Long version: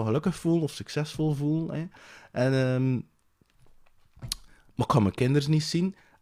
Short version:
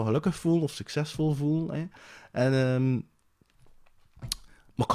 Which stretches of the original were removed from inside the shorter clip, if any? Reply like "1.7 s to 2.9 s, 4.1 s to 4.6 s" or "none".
none